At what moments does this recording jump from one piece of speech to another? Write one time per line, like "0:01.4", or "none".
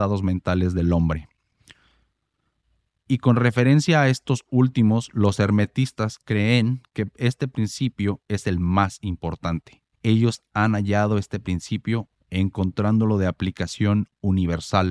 0:09.9